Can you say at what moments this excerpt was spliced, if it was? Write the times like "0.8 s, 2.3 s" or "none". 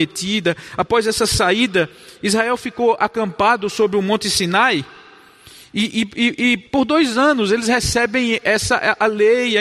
6.7 s

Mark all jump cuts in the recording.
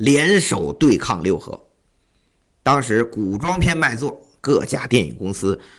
2.5 s

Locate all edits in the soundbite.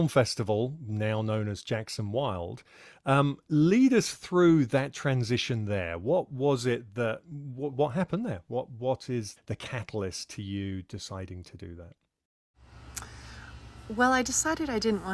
7.7 s, 9.4 s

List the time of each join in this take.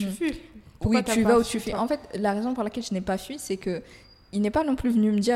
none

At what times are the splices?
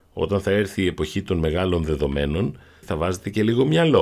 2.8 s

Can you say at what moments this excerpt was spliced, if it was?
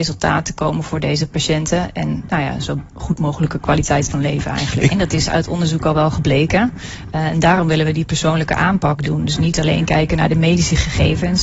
4.9 s

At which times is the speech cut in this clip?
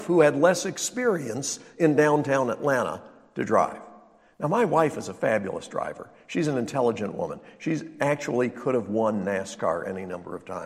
none

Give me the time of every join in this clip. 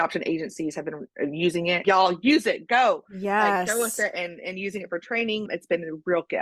1.8 s, 5.5 s

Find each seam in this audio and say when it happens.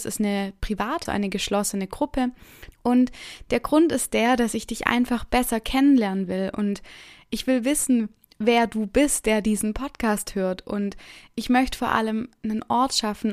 1.1 s, 2.7 s

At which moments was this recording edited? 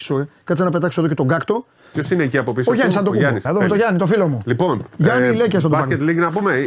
3.4 s

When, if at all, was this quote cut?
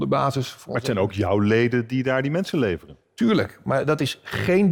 none

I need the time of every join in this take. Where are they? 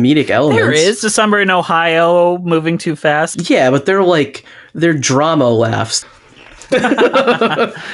3.3 s, 6.0 s

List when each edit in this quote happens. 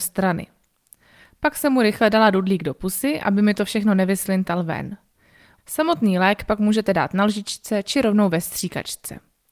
5.6 s

